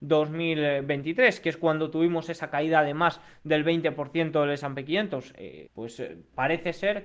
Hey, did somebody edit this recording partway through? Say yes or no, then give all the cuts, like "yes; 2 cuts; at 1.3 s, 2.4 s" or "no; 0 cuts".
yes; 1 cut; at 5.7 s